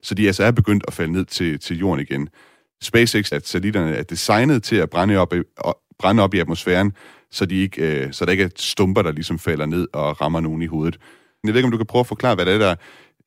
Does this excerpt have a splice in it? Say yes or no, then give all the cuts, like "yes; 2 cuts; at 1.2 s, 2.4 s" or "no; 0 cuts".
yes; 2 cuts; at 3.3 s, 11.4 s